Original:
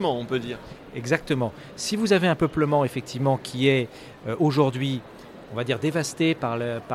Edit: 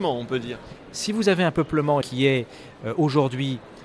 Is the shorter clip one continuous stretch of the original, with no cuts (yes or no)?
no